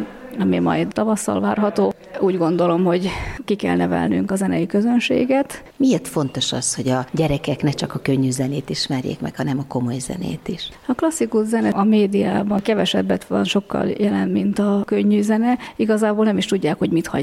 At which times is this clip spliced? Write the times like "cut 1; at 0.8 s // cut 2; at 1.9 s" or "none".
cut 1; at 5.7 s